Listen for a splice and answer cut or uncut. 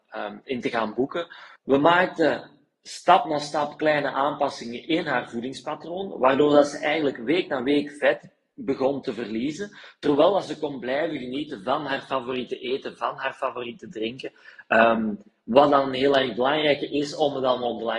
cut